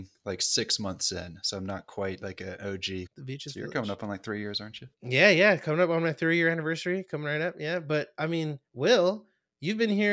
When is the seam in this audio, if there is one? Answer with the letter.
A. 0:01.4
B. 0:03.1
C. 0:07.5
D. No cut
B